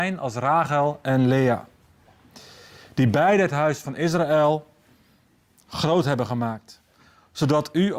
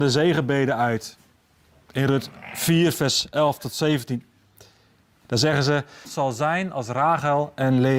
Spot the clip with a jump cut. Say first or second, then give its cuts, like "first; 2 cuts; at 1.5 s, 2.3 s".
second; 1 cut; at 6.0 s